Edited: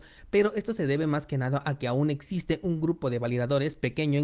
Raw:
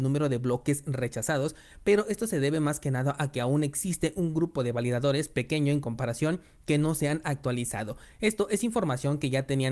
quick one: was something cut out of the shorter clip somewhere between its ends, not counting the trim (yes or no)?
no